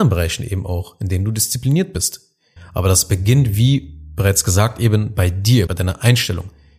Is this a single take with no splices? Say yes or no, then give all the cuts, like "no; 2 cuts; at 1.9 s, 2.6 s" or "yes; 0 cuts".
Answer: no; 2 cuts; at 2.6 s, 5.7 s